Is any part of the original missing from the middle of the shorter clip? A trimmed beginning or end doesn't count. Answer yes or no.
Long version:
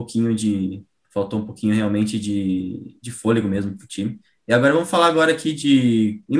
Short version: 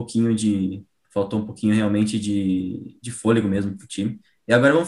no